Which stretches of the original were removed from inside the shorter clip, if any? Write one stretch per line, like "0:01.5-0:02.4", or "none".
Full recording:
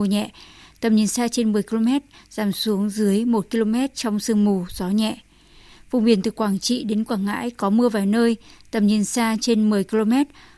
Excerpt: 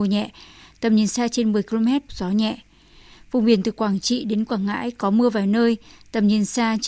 0:02.1-0:04.7

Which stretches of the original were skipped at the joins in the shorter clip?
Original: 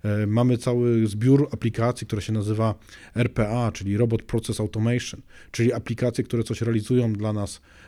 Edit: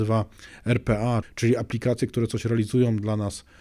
0:03.7-0:05.4

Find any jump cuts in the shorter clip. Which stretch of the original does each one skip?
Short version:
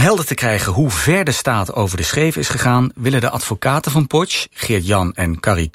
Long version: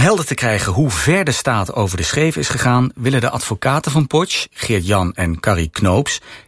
none

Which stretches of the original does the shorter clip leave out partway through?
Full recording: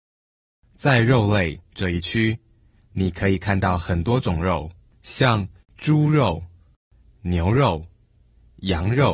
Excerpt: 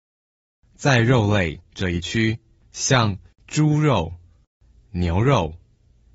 0:02.6-0:04.9

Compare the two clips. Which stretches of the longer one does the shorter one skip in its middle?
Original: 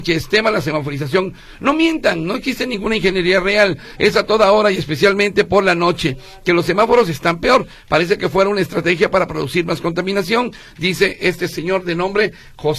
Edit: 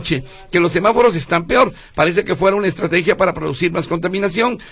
none

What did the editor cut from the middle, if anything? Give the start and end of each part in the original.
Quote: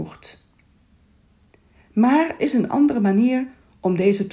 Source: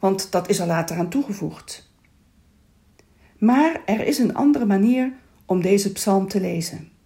0:03.8-0:04.0

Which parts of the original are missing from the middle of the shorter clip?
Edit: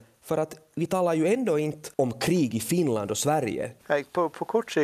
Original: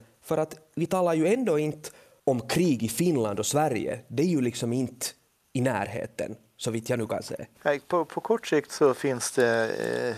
0:01.9-0:02.2
0:04.1-0:07.5

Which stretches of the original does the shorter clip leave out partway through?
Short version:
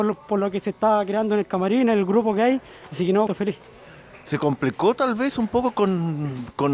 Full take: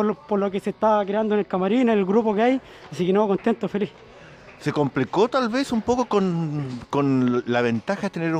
0:03.3-0:03.6

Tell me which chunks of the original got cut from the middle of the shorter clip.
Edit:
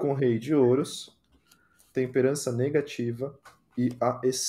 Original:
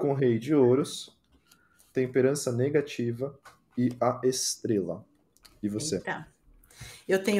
none

